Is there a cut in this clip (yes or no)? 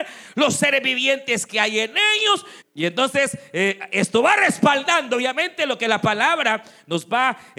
yes